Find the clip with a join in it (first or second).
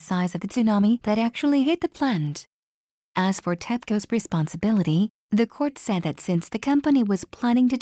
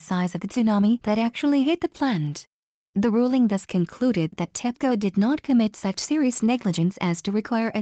second